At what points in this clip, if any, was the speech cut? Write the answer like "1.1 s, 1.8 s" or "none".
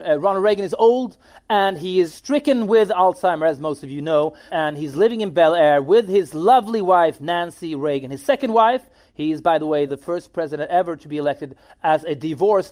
9.9 s